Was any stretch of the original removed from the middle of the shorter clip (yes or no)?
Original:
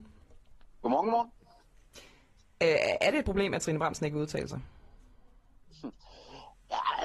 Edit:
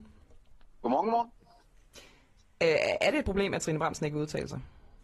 no